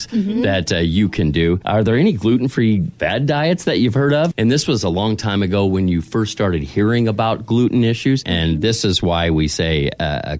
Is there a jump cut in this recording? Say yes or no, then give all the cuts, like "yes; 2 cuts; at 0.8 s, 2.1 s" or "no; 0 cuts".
yes; 2 cuts; at 4.3 s, 8.2 s